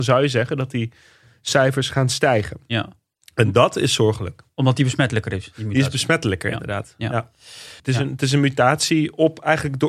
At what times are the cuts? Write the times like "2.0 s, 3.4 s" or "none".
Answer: 7.8 s